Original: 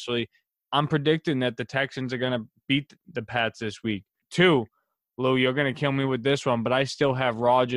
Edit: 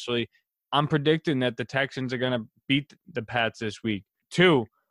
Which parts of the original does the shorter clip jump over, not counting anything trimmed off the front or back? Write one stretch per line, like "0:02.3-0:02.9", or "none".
none